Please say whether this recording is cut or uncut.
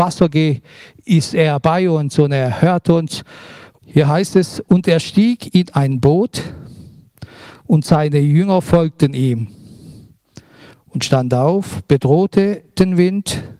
cut